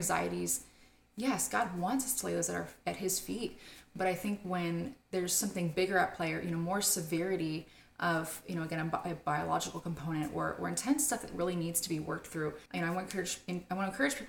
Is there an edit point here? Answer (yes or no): yes